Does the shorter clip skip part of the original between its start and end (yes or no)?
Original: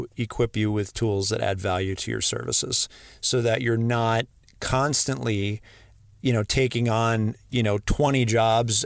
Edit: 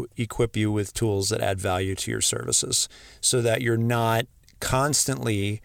no